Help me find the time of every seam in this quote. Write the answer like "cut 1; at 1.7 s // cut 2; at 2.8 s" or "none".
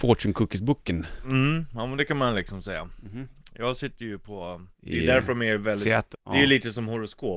cut 1; at 4.7 s // cut 2; at 6.1 s

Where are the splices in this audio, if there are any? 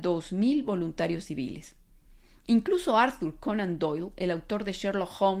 none

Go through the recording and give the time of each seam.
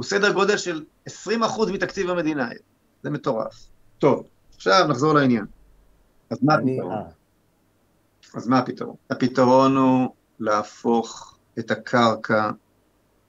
cut 1; at 6.2 s // cut 2; at 9.0 s // cut 3; at 11.5 s

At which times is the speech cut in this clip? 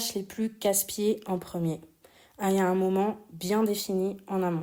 none

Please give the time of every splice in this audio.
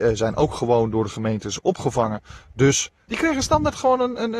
cut 1; at 3.1 s

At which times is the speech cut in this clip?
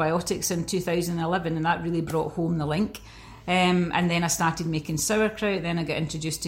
none

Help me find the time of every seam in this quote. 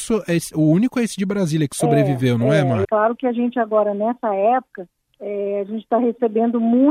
cut 1; at 2.8 s

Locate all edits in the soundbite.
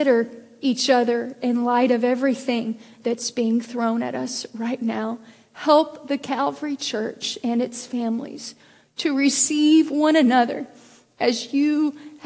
none

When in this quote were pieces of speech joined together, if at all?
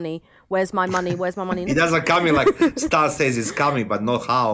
cut 1; at 1.7 s

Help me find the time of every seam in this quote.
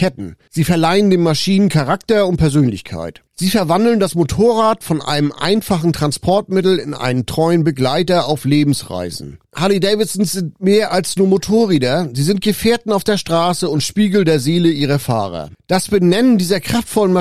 cut 1; at 9.5 s

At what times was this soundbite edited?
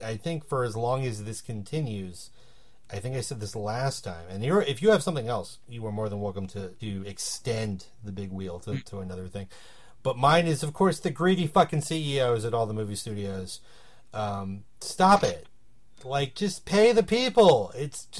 cut 1; at 6.8 s

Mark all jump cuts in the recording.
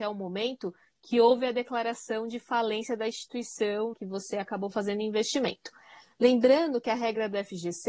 cut 1; at 3.9 s

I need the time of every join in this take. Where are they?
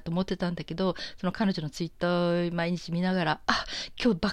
none

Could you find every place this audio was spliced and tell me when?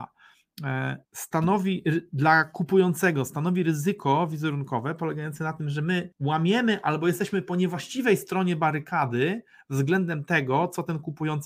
cut 1; at 1.0 s // cut 2; at 6.1 s

